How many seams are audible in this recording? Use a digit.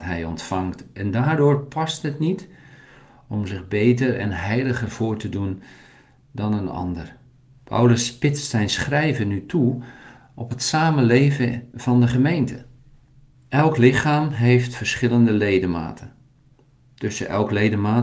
2